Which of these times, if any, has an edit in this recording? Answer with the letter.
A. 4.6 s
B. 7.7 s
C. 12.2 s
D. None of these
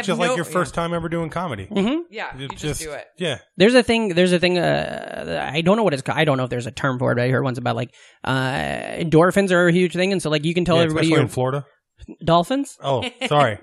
C